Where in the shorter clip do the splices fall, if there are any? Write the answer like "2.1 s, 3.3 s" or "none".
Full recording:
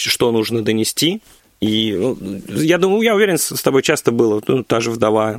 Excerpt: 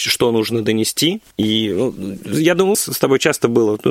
1.3 s, 2.7 s